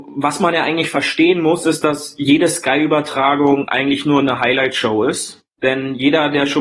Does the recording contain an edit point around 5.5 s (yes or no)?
yes